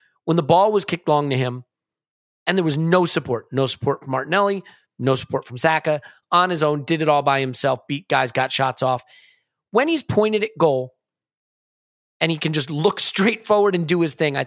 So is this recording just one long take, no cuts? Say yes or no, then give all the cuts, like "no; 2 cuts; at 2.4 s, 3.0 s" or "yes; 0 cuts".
yes; 0 cuts